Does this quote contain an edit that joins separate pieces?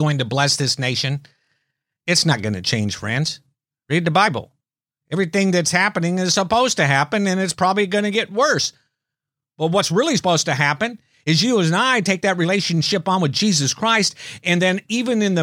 yes; 1 cut; at 2.0 s

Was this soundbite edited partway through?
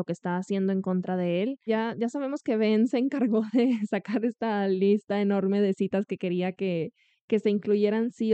yes; 1 cut; at 1.7 s

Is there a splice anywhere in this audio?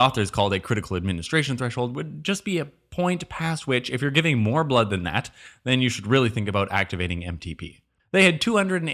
yes; 1 cut; at 8.0 s

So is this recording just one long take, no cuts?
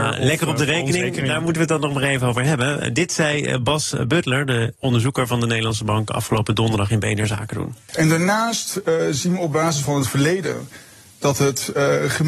yes; 0 cuts

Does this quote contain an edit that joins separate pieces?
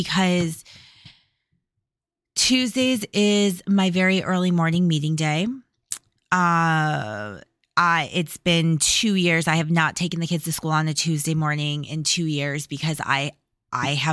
no; 0 cuts

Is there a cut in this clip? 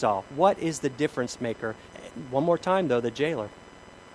yes; 1 cut; at 1.9 s

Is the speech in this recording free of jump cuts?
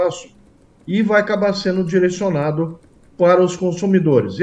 yes; 0 cuts

